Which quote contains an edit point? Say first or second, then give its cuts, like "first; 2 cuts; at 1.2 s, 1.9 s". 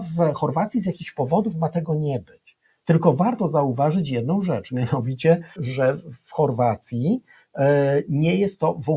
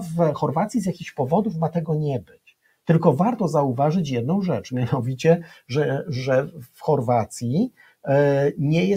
first; 1 cut; at 5.6 s